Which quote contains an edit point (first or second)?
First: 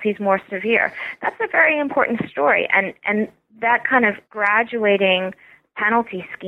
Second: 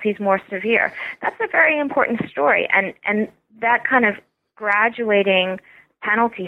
first